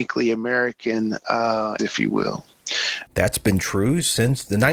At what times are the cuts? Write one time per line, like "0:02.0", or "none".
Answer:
0:01.8
0:03.1